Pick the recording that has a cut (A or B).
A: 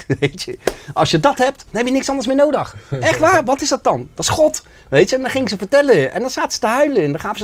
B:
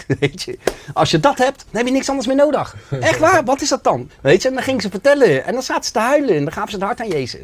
B